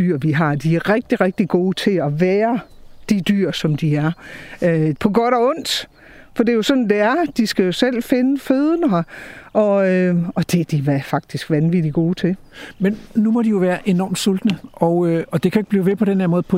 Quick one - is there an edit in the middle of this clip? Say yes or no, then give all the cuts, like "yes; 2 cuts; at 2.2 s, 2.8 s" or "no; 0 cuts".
yes; 2 cuts; at 4.9 s, 13.1 s